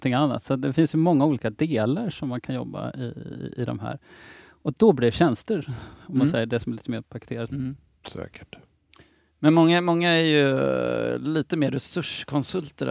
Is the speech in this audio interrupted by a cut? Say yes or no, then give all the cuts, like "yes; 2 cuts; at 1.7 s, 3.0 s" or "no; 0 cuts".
yes; 1 cut; at 7.5 s